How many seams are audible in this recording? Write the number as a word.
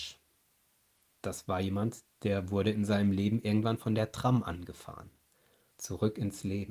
one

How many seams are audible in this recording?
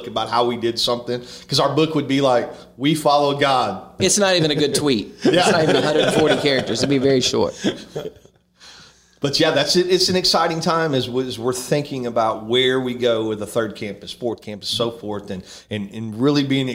one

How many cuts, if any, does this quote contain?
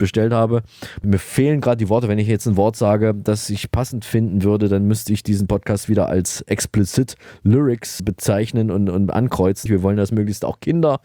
three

